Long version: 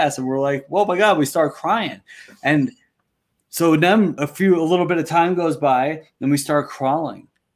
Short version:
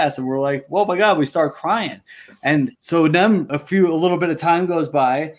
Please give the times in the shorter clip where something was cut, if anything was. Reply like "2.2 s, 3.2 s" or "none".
2.7 s